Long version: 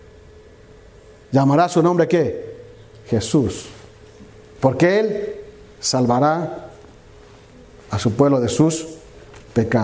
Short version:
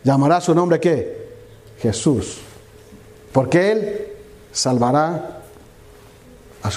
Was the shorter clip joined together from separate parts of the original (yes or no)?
no